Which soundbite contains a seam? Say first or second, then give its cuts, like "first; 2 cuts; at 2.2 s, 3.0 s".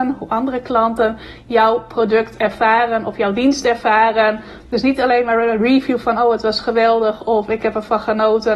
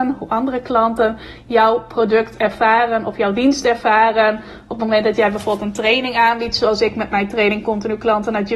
first; 1 cut; at 4.6 s